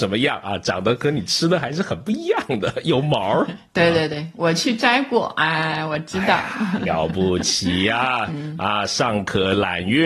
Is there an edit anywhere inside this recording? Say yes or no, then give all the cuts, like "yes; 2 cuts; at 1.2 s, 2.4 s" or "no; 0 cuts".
no; 0 cuts